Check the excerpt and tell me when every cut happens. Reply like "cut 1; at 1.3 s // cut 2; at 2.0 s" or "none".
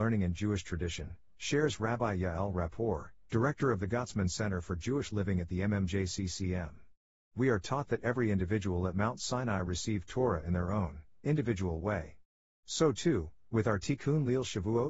none